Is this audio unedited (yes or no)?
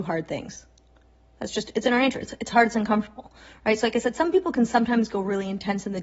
yes